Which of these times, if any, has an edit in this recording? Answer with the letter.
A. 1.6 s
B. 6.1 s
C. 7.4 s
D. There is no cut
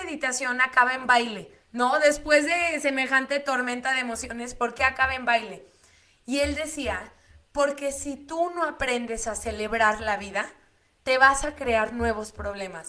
A